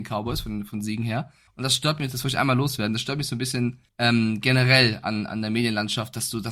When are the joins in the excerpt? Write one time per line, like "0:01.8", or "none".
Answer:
0:01.5
0:03.9